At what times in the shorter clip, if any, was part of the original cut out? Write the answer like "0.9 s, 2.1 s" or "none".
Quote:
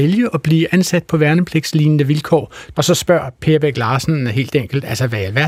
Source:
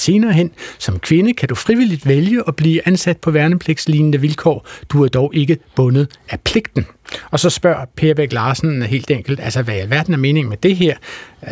2.7 s